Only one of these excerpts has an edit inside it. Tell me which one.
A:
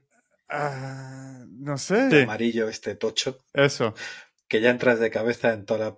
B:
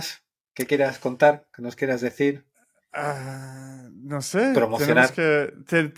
A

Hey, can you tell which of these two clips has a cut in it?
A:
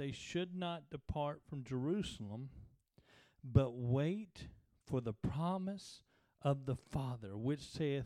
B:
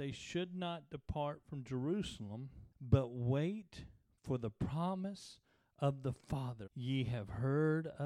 B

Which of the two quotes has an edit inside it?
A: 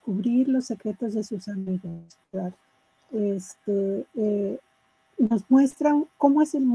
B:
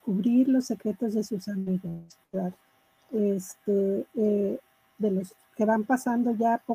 B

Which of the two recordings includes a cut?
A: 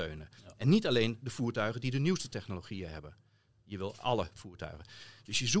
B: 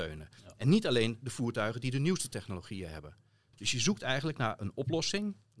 B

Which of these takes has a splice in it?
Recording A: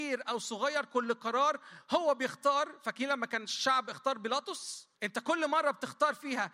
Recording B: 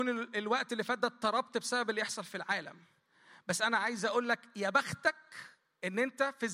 A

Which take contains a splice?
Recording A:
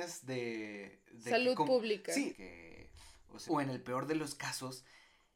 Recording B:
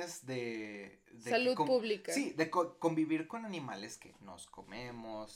A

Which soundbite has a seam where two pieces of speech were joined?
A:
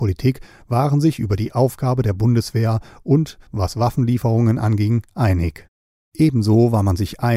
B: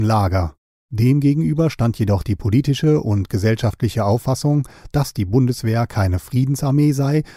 A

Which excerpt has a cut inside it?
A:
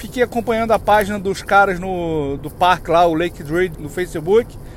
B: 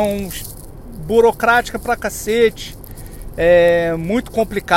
A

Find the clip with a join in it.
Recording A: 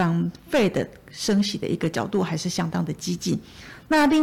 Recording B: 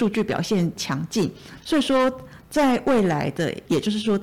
B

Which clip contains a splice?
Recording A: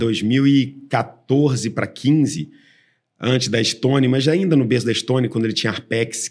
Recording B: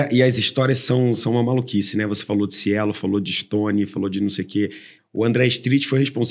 B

